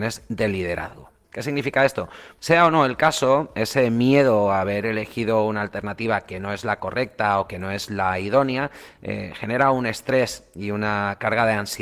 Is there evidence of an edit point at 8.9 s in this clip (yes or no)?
no